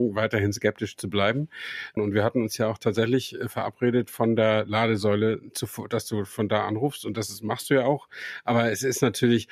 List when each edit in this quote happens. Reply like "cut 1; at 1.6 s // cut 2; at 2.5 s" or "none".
cut 1; at 2.0 s